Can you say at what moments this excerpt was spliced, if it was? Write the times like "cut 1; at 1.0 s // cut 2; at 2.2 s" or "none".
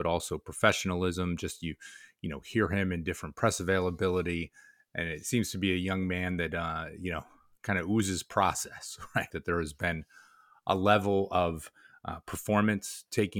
cut 1; at 9.3 s